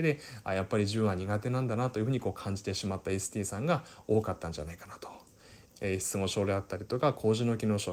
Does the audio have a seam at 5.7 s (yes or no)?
yes